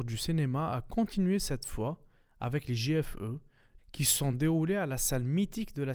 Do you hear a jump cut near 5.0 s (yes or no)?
no